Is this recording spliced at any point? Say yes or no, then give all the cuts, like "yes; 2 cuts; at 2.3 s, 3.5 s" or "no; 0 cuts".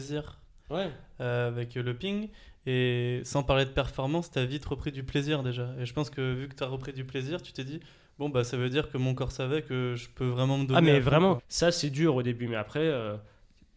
yes; 1 cut; at 11.4 s